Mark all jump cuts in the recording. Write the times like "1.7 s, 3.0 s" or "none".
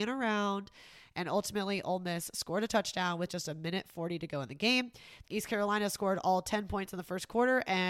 5.2 s